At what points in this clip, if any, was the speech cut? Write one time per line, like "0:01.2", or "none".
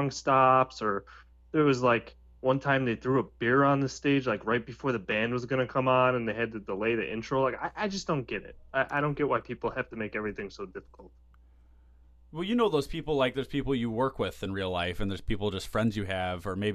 none